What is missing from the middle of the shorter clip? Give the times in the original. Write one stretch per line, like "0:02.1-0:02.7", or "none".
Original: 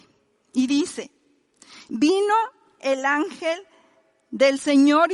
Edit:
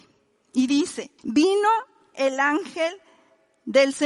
0:01.2-0:01.8